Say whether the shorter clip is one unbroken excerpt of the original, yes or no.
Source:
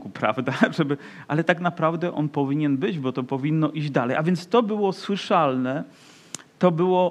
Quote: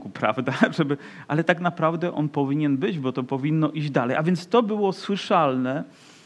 yes